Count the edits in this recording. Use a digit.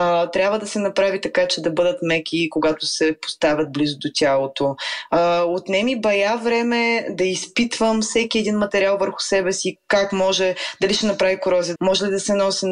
2